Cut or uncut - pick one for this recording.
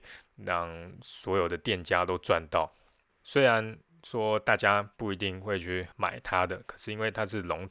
cut